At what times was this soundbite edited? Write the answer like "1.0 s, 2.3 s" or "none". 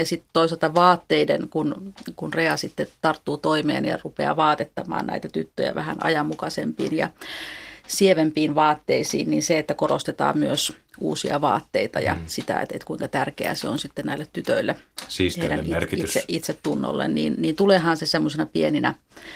none